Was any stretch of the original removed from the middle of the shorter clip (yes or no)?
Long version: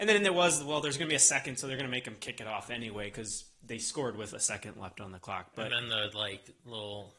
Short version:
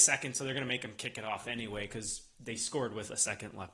no